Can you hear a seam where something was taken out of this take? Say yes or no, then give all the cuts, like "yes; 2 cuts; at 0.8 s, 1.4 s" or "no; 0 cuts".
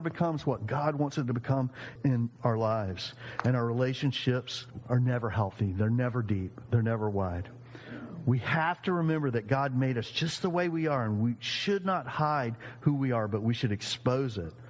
no; 0 cuts